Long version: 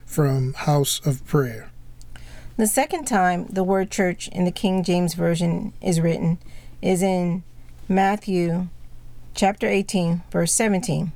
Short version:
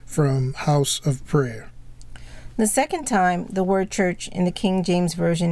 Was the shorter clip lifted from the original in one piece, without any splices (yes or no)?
yes